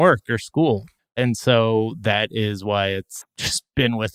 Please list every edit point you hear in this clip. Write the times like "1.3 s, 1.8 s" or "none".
1.0 s, 3.2 s